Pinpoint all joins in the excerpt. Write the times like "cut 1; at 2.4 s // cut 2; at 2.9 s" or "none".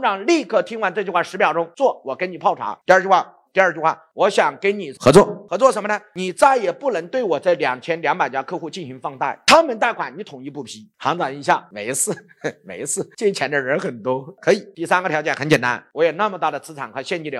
cut 1; at 3.5 s